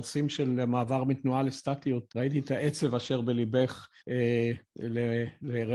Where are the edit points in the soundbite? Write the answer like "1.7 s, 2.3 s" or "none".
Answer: 2.1 s, 4.0 s